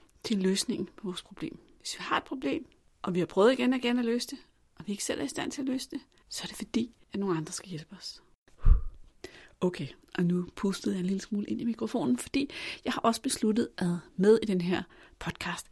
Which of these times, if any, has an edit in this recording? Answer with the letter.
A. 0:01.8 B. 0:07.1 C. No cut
B